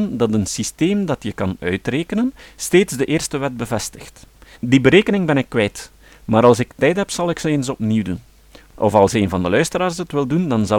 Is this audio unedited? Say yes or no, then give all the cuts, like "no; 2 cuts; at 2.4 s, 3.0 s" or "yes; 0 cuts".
no; 1 cut; at 4.6 s